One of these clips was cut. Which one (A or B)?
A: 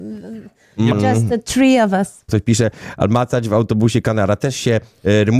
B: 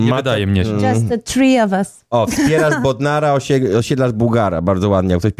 A